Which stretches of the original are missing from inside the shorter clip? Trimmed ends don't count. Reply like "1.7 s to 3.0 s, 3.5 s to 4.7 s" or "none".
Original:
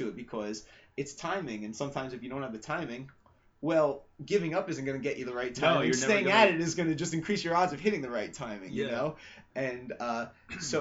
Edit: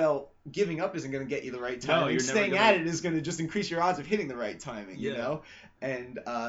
none